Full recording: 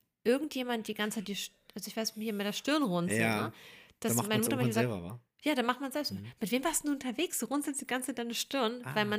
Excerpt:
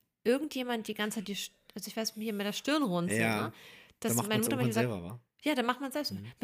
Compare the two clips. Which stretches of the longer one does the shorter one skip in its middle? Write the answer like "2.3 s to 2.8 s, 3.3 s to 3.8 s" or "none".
none